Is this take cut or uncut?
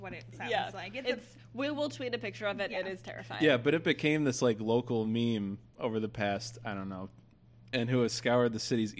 cut